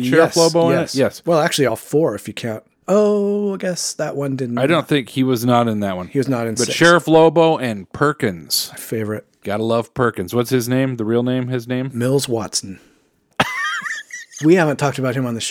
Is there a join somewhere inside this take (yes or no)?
no